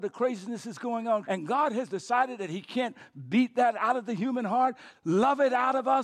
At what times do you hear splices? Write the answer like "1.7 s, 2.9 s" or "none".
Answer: 1.2 s, 4.9 s